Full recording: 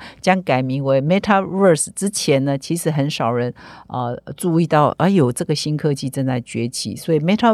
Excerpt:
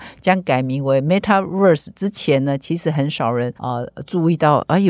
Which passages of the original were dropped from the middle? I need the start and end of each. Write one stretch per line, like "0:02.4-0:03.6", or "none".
0:03.6-0:03.9